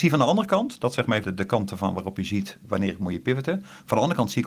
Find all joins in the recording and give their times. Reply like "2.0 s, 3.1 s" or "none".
1.2 s